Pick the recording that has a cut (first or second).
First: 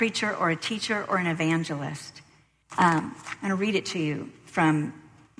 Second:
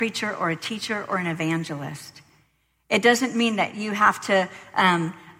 first